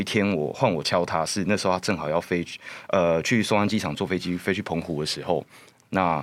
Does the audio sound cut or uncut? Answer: uncut